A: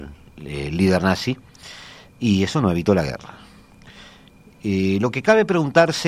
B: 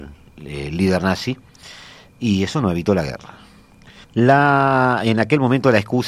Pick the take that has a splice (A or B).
B